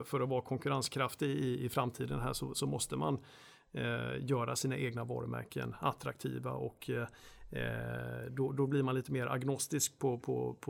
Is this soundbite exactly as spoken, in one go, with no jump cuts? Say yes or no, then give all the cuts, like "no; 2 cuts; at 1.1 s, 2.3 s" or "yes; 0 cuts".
yes; 0 cuts